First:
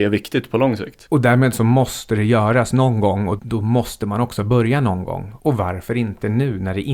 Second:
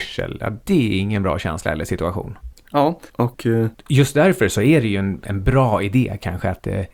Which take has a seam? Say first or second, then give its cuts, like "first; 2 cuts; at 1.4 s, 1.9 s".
first; 1 cut; at 3.4 s